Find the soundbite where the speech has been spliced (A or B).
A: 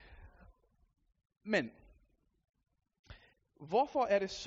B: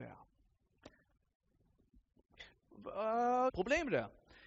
B